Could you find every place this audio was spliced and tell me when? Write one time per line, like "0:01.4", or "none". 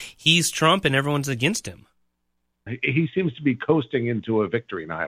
0:02.7